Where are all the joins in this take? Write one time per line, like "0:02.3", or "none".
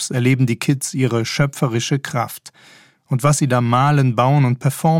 none